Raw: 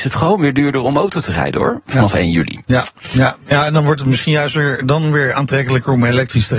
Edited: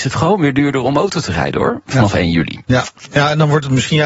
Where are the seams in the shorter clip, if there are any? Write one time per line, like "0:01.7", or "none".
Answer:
0:03.0